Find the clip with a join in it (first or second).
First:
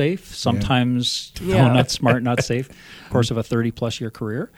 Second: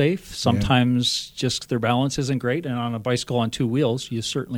first